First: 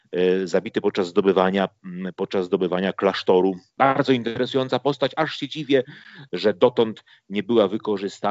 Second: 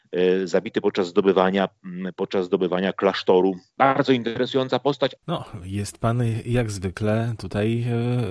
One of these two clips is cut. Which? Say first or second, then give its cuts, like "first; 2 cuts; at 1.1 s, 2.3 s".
second; 1 cut; at 5.2 s